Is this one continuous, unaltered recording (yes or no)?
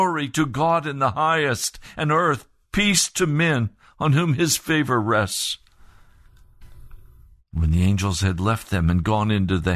yes